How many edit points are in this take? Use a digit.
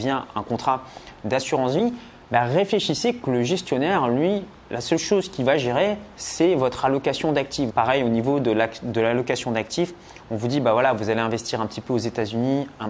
1